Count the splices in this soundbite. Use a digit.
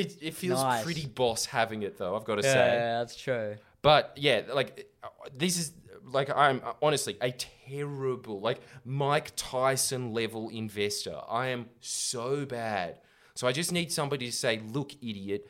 0